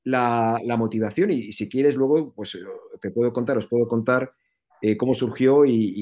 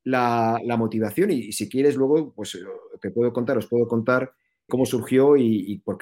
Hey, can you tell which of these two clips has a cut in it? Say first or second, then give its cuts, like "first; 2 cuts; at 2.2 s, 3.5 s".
second; 1 cut; at 4.7 s